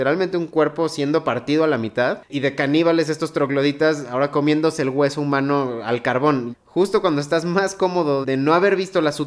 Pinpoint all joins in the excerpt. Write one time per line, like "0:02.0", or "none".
0:06.5
0:08.2